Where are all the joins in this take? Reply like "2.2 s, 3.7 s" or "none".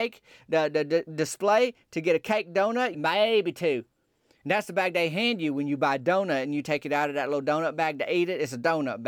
2.9 s